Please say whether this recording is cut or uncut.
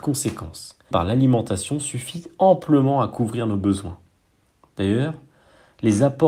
cut